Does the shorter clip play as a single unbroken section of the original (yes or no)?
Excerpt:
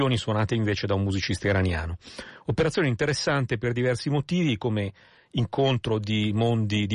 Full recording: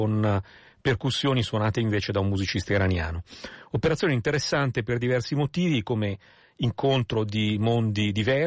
yes